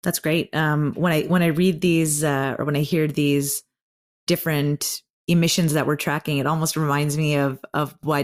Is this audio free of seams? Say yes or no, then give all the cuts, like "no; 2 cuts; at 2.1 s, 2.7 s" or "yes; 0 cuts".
yes; 0 cuts